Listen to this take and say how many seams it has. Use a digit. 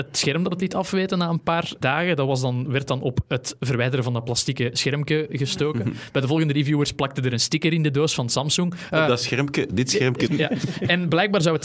1